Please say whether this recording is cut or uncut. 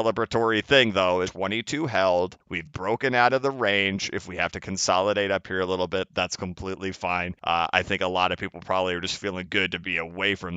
cut